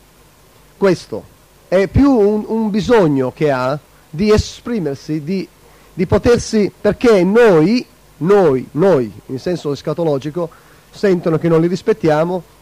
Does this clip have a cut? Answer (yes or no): yes